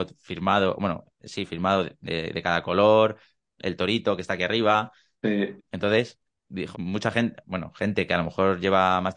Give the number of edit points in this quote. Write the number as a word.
two